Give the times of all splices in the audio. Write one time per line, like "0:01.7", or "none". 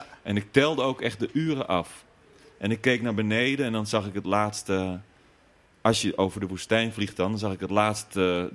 none

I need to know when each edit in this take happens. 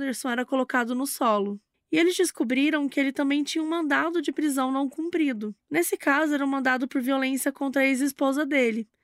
0:01.7

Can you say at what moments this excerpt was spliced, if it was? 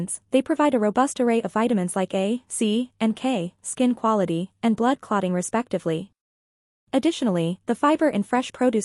0:03.6
0:06.7

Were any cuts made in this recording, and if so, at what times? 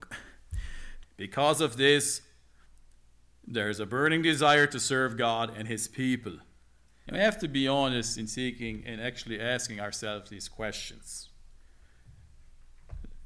0:01.0
0:07.1

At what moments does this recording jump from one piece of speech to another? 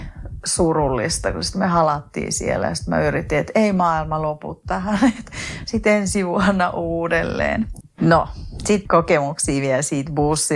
0:07.8

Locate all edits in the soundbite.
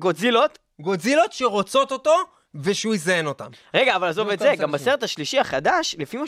none

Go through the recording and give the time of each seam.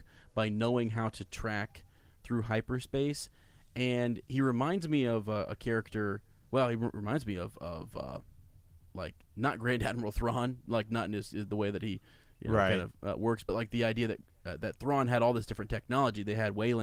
none

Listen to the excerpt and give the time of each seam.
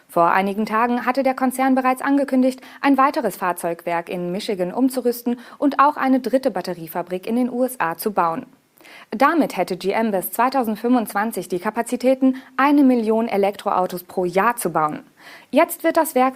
0:15.4

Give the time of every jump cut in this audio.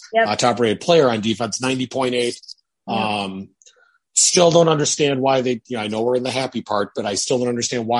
none

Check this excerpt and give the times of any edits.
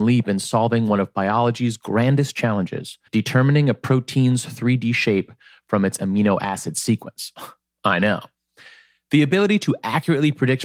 0:03.1

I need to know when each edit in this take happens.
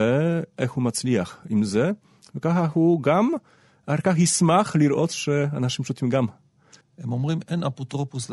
0:06.8

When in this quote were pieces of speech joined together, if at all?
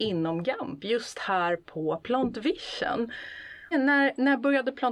0:03.7

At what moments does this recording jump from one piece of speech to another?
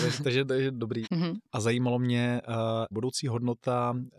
0:01.0
0:02.9

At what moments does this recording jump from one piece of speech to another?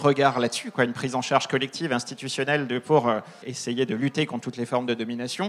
0:03.4

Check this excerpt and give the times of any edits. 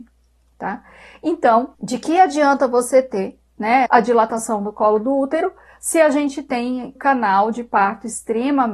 0:03.9
0:07.0

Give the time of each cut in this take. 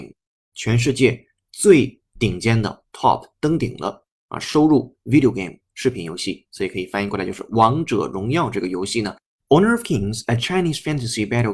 0:09.4

